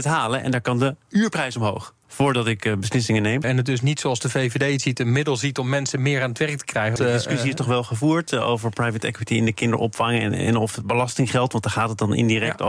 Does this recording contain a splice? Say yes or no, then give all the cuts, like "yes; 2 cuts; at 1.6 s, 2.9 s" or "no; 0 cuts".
yes; 3 cuts; at 2.0 s, 3.4 s, 7.0 s